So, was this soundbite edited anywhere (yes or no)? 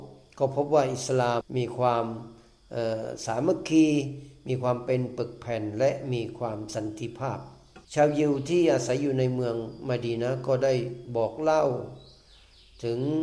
yes